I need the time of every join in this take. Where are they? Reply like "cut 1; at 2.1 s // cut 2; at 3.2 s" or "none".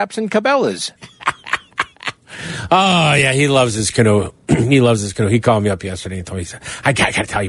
cut 1; at 1.0 s